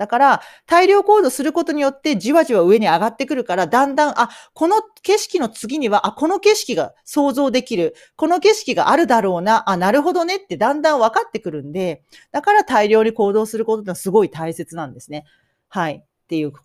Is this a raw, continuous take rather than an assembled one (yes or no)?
yes